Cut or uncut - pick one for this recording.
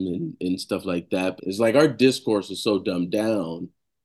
cut